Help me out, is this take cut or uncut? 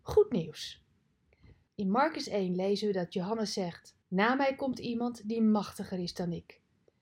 cut